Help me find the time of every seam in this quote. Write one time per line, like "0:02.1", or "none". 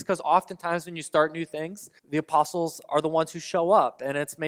0:02.0